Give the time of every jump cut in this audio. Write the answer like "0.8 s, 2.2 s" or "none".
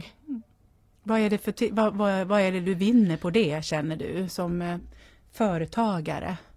none